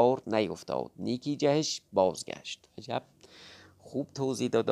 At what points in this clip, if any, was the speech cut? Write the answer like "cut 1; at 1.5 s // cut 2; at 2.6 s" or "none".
cut 1; at 2.7 s